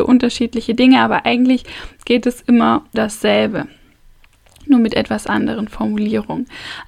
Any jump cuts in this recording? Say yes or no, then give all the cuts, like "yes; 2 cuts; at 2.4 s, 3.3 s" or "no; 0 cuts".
yes; 1 cut; at 2.9 s